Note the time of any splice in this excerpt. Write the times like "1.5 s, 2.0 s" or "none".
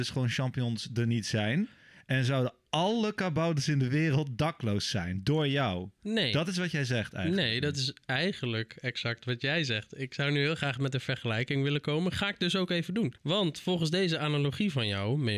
13.2 s